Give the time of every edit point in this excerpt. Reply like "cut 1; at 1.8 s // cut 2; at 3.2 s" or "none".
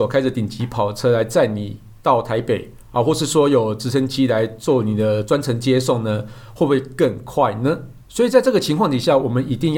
cut 1; at 8.0 s